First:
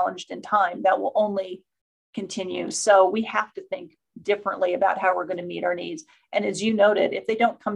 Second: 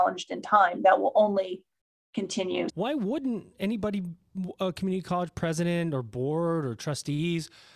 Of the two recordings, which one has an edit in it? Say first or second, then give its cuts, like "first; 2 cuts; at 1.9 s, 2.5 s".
second; 1 cut; at 2.7 s